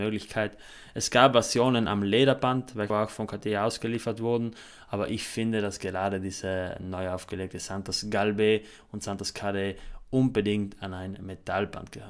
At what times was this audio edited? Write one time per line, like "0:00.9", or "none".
0:02.9